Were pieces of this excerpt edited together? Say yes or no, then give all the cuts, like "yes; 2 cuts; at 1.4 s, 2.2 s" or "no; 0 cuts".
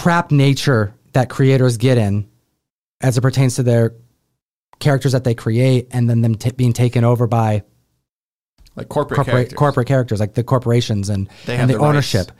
no; 0 cuts